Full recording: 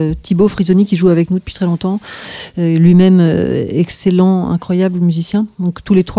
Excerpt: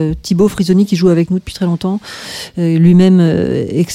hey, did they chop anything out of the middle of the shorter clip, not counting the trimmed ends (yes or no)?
no